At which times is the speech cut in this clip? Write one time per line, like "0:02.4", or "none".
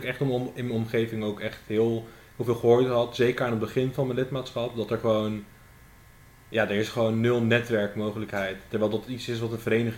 none